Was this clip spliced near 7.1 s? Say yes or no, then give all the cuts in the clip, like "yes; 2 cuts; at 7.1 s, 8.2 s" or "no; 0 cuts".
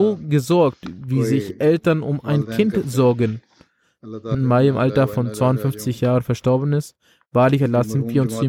no; 1 cut; at 4.3 s